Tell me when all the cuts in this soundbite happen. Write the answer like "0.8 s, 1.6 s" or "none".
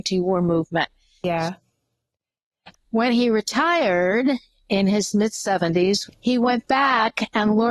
1.2 s, 2.7 s, 6.1 s